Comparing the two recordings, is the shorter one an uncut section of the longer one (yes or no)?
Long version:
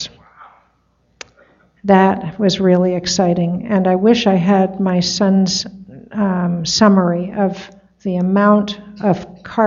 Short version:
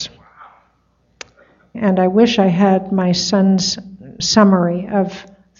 no